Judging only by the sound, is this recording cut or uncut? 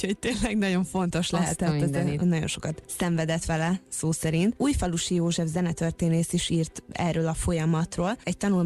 cut